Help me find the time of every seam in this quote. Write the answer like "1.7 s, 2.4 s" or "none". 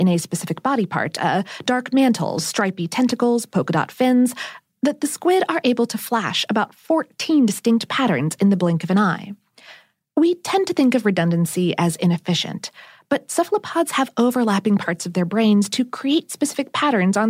none

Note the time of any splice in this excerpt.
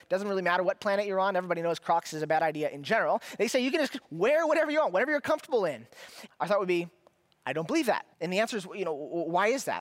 6.3 s, 8.1 s

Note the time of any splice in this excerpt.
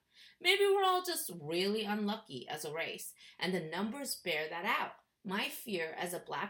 3.3 s

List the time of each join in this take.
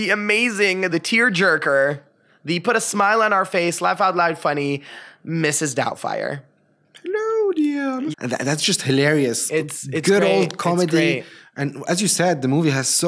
0.9 s, 8.1 s

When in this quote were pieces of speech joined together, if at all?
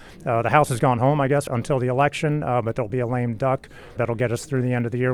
1.5 s, 2.9 s, 4.0 s

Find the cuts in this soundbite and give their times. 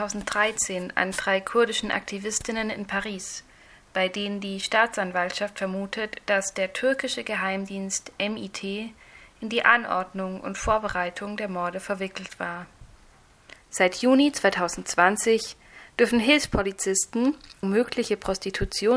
13.6 s, 17.6 s

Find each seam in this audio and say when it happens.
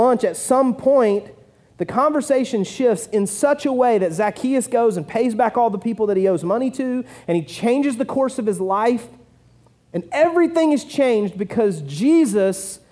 none

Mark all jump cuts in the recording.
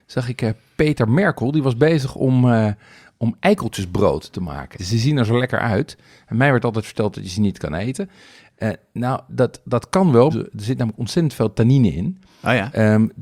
4.8 s, 10.3 s

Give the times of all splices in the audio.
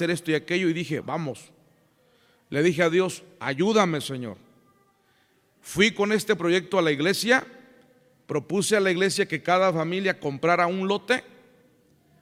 1.0 s

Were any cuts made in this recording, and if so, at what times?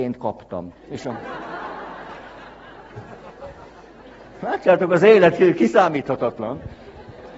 none

